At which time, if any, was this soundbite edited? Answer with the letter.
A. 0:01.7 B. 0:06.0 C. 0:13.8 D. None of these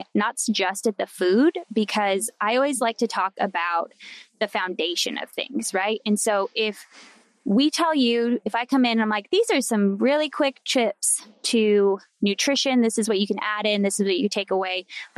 D